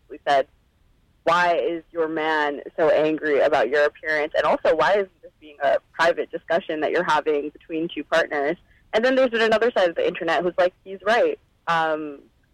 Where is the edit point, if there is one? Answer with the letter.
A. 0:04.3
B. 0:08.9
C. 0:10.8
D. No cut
C